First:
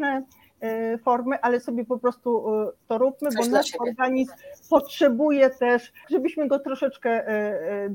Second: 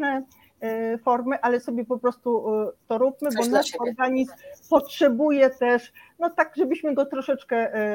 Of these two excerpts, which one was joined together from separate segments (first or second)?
first